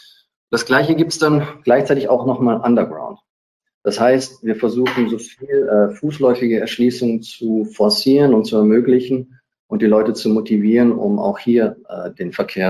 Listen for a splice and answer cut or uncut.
uncut